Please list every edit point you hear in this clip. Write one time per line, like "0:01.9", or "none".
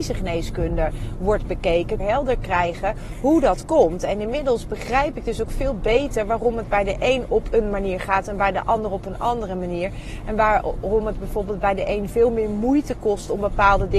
0:02.0